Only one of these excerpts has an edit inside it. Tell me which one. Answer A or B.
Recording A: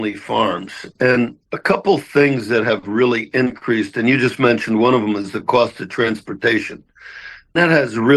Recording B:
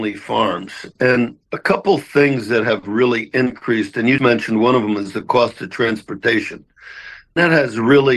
B